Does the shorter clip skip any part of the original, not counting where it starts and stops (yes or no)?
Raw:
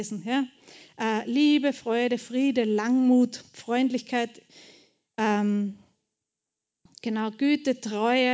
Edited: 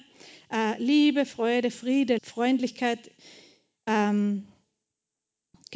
yes